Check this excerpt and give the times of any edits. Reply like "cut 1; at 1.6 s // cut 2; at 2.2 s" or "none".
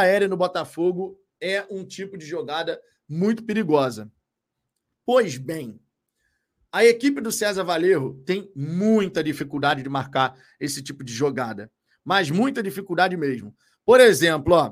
none